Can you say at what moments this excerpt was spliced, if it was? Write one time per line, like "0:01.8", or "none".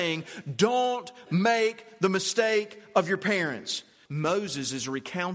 0:04.1

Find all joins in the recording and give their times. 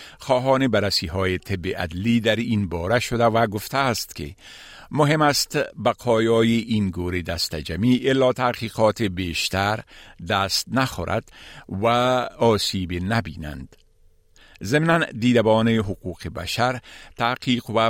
none

